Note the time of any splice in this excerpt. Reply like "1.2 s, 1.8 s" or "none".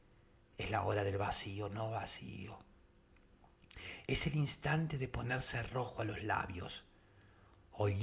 none

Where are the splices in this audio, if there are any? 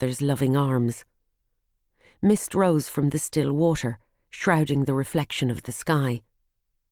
none

